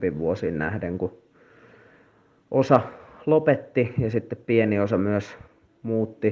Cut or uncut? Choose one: uncut